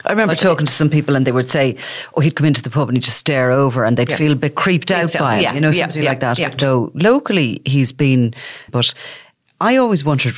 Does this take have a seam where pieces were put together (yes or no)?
yes